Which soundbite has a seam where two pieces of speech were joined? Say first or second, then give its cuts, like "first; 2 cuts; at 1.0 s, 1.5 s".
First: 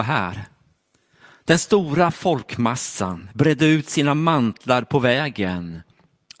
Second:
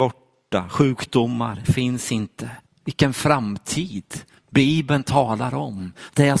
second; 1 cut; at 2.7 s